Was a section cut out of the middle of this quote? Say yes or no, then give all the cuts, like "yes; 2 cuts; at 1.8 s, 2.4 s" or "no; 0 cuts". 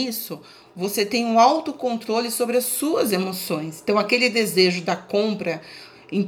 no; 0 cuts